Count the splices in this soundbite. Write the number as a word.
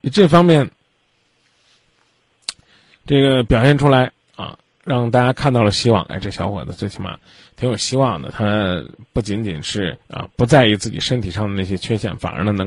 two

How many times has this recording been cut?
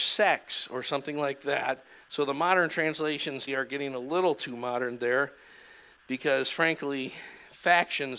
two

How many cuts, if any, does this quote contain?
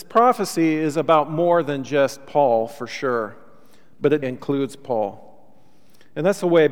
one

